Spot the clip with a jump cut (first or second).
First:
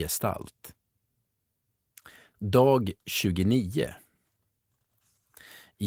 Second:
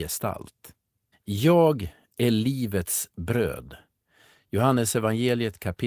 second